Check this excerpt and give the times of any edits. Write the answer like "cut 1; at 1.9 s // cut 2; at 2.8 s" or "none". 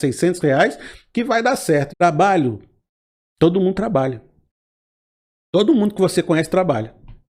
cut 1; at 1.9 s